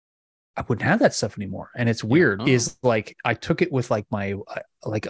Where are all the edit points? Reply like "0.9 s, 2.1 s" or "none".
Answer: 2.4 s